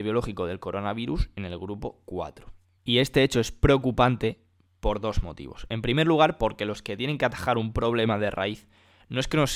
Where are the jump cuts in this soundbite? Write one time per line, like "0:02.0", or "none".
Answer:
0:02.8